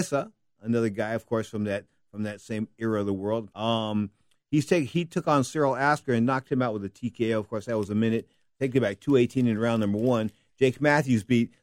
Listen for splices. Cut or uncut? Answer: cut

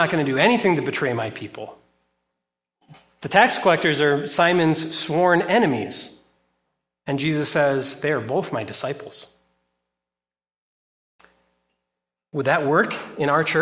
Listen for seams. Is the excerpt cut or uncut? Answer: uncut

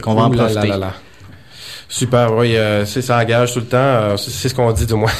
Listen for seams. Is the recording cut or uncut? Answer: uncut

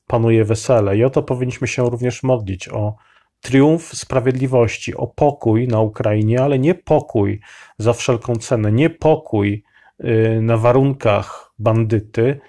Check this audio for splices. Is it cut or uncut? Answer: uncut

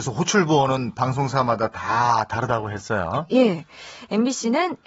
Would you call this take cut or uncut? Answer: uncut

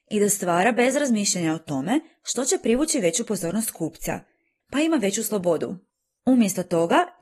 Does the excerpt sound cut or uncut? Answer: cut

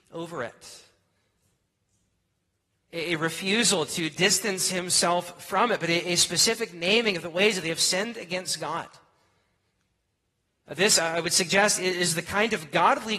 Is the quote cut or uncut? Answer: uncut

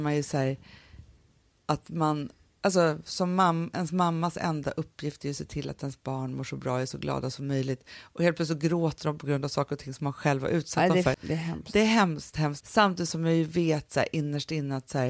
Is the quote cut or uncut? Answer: cut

